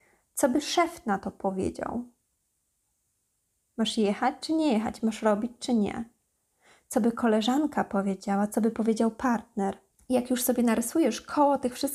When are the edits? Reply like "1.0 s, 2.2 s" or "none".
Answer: 5.0 s